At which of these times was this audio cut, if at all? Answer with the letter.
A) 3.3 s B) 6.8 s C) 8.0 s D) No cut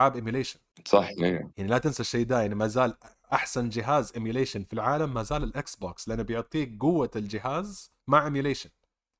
C